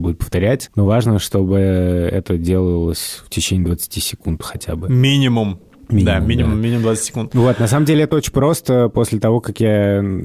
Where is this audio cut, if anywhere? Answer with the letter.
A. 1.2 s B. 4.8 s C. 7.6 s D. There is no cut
D